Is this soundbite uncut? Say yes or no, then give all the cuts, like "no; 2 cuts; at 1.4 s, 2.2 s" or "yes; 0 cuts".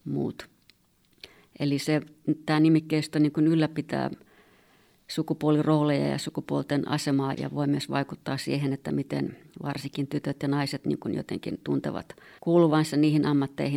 no; 2 cuts; at 7.3 s, 12.4 s